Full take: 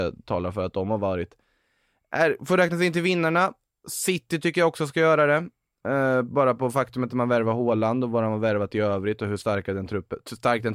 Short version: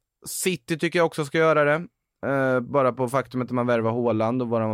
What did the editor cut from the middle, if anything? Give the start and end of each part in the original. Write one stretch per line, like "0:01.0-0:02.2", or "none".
none